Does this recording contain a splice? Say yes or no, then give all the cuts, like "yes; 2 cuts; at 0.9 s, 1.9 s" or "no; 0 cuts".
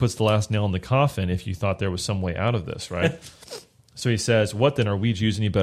no; 0 cuts